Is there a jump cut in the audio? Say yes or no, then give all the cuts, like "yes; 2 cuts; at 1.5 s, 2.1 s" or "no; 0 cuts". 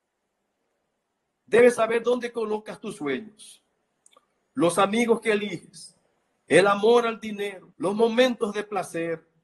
yes; 1 cut; at 7.7 s